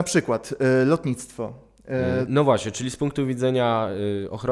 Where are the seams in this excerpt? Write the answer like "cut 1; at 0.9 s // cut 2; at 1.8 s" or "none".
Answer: cut 1; at 2.3 s